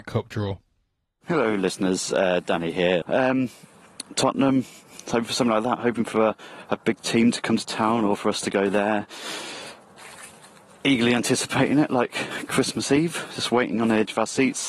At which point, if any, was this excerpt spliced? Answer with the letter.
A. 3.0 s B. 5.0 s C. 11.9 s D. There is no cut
A